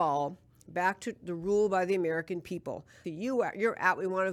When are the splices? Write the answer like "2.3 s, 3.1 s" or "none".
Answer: 3.0 s

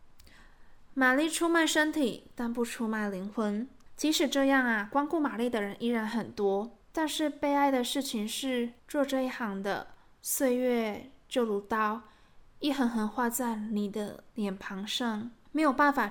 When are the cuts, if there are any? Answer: 8.8 s, 14.3 s

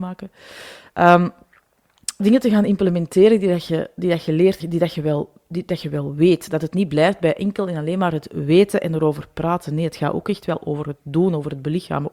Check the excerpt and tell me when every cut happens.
2.2 s, 4.6 s

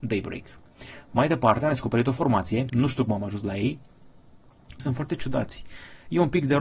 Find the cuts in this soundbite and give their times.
2.7 s, 4.8 s

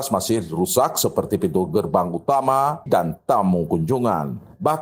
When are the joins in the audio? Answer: 2.9 s

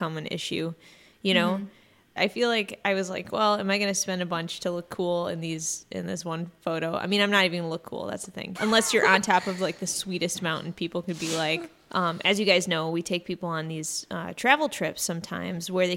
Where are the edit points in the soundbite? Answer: 2.2 s, 8.5 s, 11.9 s

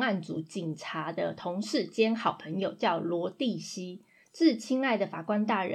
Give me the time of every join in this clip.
4.2 s

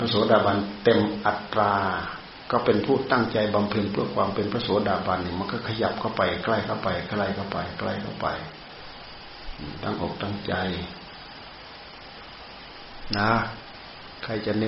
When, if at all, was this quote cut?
none

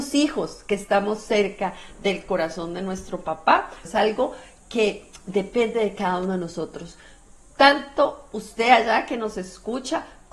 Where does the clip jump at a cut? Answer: 3.8 s

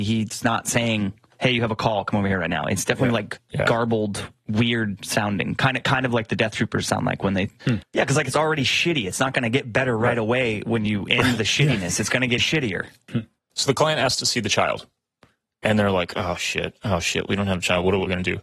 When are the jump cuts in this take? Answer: 7.8 s, 12.4 s

